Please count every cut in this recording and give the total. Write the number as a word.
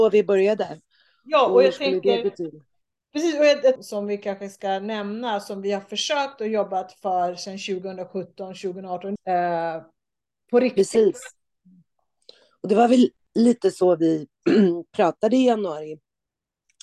two